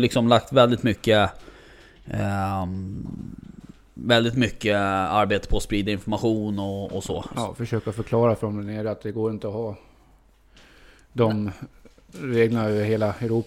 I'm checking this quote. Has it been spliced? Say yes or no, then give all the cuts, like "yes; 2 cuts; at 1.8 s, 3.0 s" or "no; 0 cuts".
yes; 1 cut; at 7.3 s